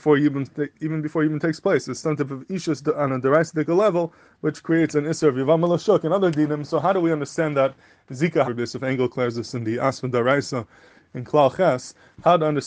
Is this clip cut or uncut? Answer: cut